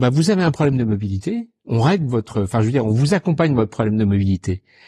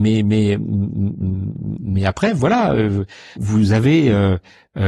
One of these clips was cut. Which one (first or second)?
second